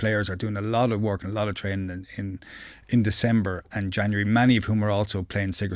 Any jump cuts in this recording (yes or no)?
no